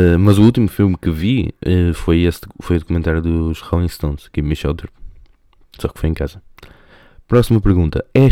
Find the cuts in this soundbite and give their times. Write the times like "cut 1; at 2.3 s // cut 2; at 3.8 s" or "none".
none